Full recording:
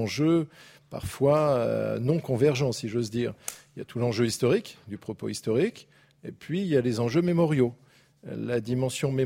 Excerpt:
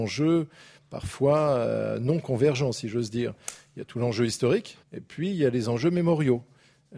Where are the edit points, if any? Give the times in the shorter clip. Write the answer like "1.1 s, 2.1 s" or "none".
4.8 s

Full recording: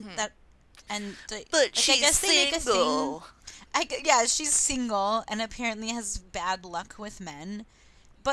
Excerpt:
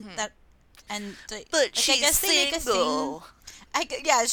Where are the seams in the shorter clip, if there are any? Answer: none

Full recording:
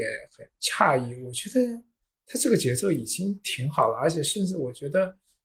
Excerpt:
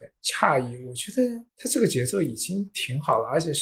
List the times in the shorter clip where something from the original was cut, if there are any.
1.5 s

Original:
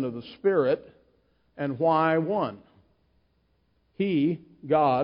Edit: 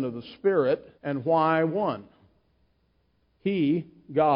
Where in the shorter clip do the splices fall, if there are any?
1.0 s

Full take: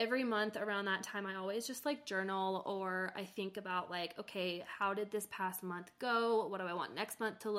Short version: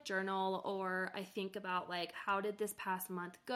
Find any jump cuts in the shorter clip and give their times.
2.1 s

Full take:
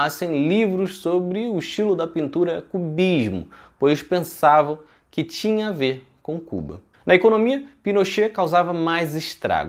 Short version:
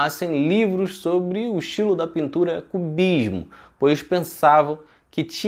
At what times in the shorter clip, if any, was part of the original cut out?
none

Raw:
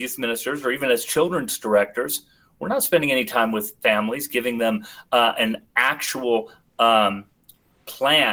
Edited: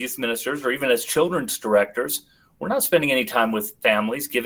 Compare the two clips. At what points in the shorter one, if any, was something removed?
none

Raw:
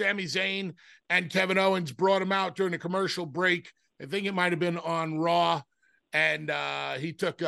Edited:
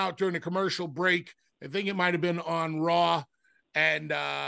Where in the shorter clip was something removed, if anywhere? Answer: none

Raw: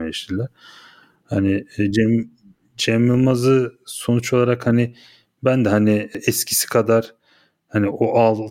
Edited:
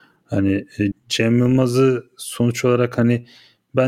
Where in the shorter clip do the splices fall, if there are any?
0.9 s

